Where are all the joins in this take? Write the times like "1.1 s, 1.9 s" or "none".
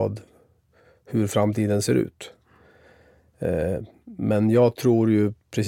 none